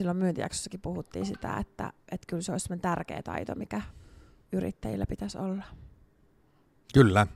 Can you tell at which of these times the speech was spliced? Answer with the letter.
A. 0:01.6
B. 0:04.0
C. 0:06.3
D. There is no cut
D